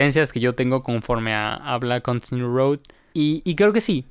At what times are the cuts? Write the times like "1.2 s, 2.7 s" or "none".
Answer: 3.1 s

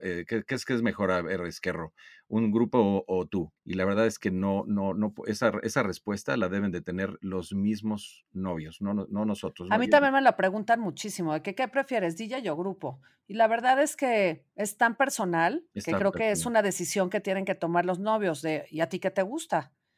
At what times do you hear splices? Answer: 3.6 s

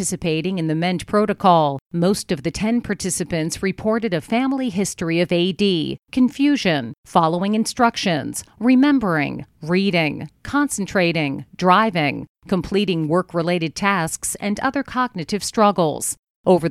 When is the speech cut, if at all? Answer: 7.0 s

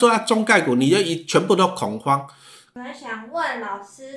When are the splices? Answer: 2.8 s

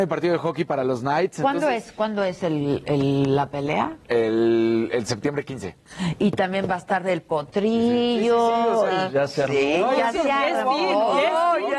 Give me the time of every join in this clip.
none

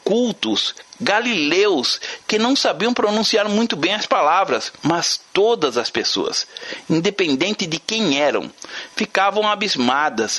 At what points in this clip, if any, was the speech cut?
4.8 s

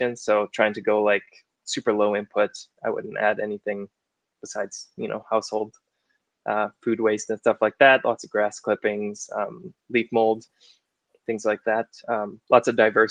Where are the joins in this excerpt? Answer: 2.8 s

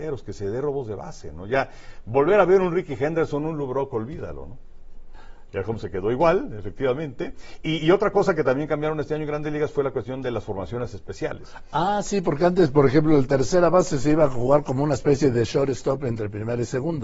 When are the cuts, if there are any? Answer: 5.5 s

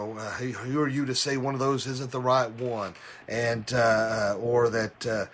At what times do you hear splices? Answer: none

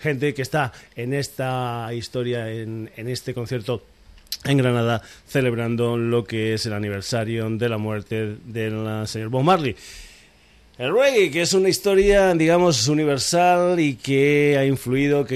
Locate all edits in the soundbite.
none

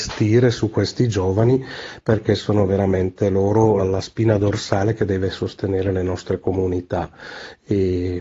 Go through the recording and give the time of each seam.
3.8 s

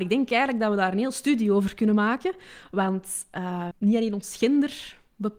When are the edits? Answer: 3.7 s

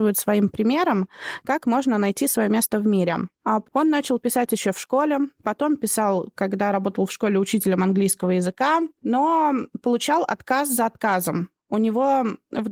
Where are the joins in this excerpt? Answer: 3.6 s

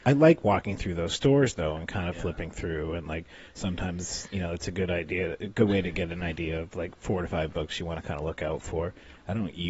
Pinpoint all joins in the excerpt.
none

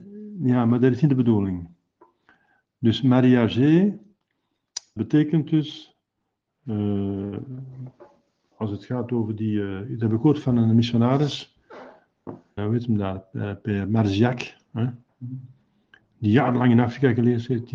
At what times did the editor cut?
5.0 s, 12.6 s

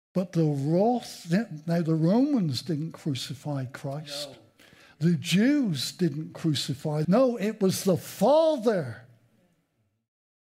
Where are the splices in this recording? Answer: 7.0 s

